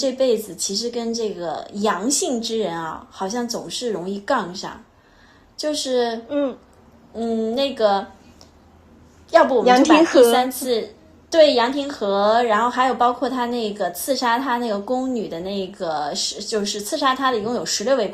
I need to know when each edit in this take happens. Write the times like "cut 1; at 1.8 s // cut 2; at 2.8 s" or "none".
none